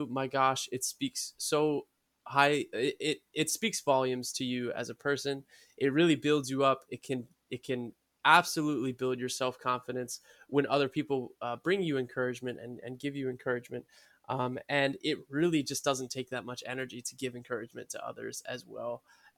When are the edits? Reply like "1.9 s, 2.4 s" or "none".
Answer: none